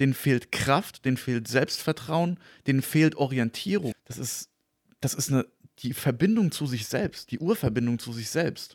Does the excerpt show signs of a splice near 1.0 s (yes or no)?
no